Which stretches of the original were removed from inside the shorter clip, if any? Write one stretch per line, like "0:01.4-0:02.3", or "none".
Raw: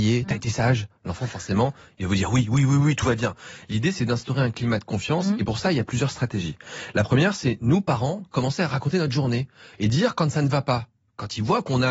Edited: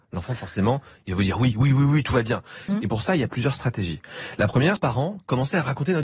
0:03.6-0:05.2
0:07.3-0:07.8